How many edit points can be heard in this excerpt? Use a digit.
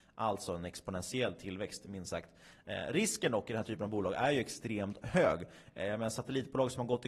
0